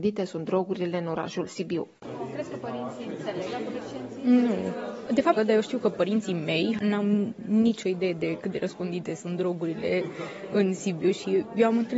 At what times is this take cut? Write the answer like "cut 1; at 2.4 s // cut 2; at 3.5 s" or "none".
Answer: cut 1; at 5.4 s